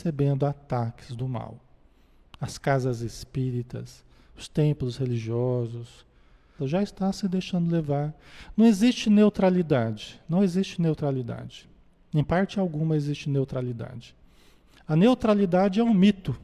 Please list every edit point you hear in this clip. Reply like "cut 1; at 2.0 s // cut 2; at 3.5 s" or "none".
cut 1; at 6.6 s